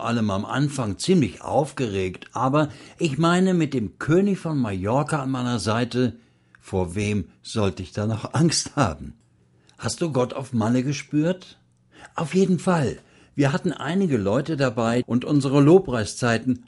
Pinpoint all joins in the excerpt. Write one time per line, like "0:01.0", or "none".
0:15.0